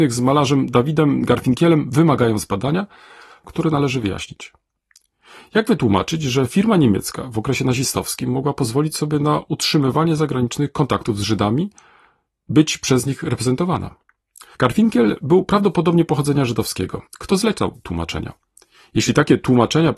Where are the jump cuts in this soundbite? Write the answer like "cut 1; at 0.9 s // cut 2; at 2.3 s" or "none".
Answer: cut 1; at 3.4 s // cut 2; at 14.5 s // cut 3; at 17.1 s